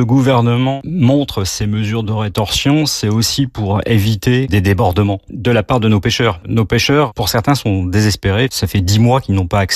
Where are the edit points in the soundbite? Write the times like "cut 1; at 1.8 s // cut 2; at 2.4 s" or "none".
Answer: cut 1; at 4.5 s